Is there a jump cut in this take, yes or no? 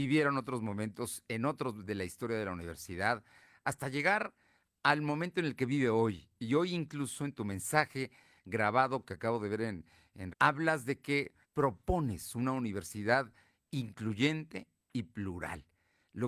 yes